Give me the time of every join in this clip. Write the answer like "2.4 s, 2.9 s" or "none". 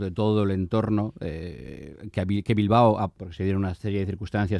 2.1 s, 3.2 s